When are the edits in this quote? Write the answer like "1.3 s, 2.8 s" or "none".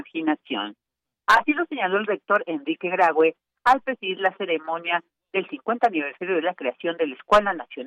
none